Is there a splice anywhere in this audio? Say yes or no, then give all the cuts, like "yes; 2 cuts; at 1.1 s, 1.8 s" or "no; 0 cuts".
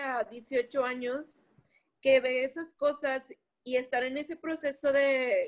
no; 0 cuts